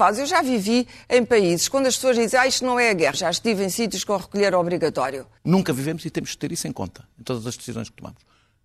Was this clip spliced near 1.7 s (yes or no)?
no